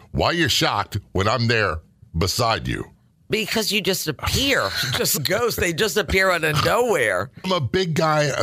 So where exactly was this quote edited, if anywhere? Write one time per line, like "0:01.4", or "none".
0:05.2
0:07.4